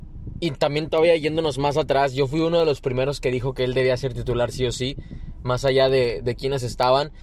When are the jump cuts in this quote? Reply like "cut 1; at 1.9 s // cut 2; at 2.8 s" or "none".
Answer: none